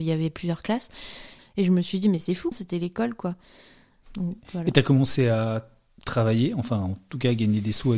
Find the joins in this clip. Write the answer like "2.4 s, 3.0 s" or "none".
1.4 s, 2.5 s